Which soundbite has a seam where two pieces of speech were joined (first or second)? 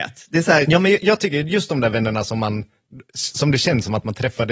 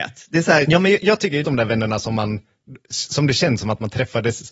second